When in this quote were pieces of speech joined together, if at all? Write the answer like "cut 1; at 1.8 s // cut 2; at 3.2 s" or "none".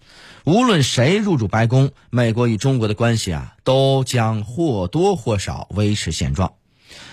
none